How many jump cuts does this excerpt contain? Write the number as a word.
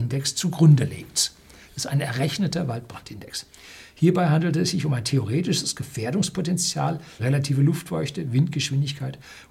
one